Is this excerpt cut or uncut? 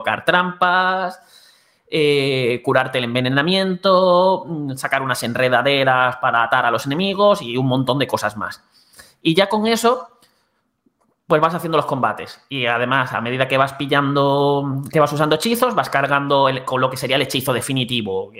uncut